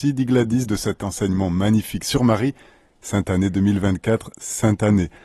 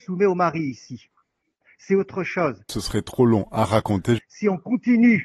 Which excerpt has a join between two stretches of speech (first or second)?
second